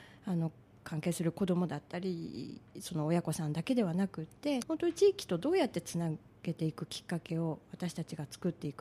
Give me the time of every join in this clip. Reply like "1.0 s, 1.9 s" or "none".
4.6 s